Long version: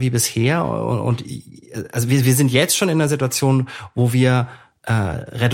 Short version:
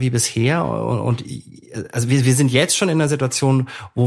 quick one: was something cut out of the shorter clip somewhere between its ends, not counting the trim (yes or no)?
no